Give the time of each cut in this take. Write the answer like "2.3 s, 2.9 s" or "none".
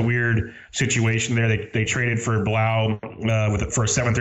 none